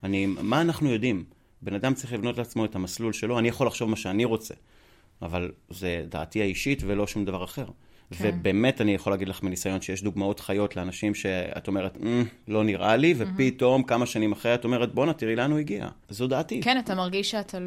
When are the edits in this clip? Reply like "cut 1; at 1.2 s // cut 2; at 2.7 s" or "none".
cut 1; at 16.0 s